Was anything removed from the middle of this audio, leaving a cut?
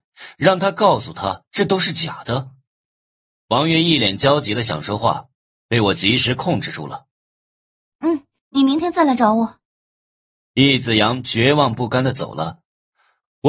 yes; 1 cut; at 8.4 s

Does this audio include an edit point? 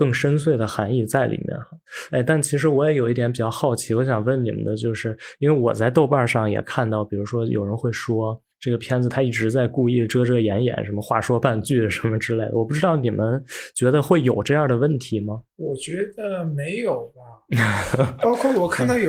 no; 0 cuts

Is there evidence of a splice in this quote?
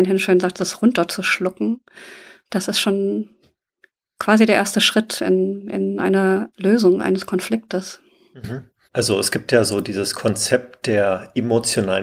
no; 0 cuts

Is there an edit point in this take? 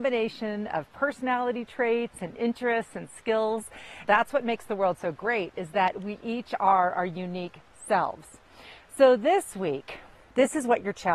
yes; 1 cut; at 4.0 s

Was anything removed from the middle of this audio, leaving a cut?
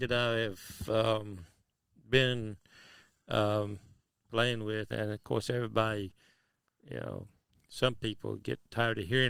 yes; 1 cut; at 4.9 s

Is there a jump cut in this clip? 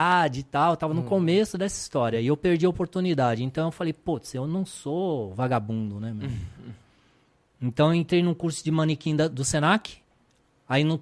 no; 0 cuts

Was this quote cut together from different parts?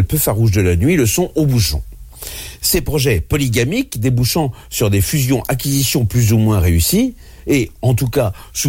no; 0 cuts

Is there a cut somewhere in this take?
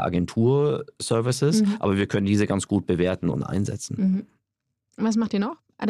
no; 0 cuts

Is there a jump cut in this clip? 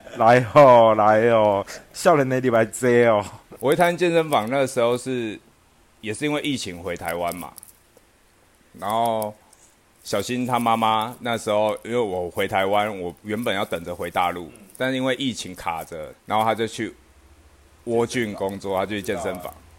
yes; 1 cut; at 16.1 s

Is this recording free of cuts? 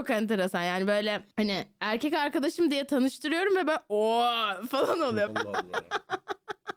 no; 2 cuts; at 1.3 s, 5.3 s

